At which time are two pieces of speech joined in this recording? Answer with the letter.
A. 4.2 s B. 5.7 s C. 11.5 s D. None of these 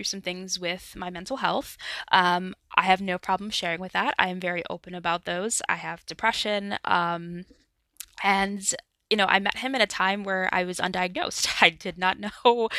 B